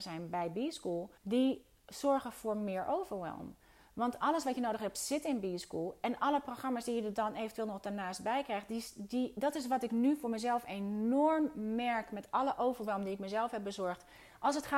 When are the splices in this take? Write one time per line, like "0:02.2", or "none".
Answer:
0:01.2

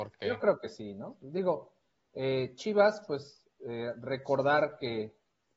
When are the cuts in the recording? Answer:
none

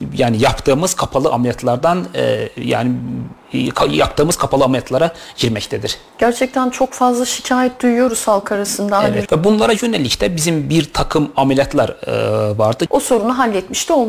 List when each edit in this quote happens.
0:09.3
0:12.9

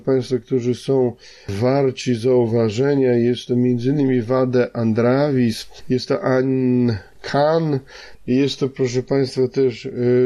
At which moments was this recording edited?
0:05.8
0:08.1

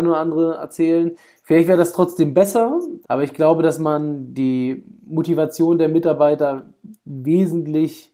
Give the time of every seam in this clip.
0:01.4
0:03.0

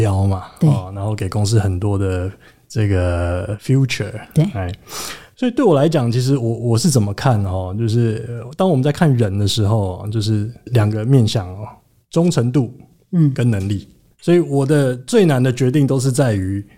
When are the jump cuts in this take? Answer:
none

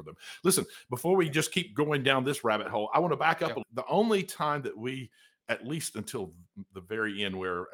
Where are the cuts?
0:03.6

